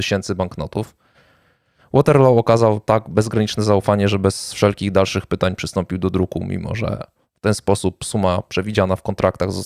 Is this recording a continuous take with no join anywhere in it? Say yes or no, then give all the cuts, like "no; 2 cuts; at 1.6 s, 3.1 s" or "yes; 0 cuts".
yes; 0 cuts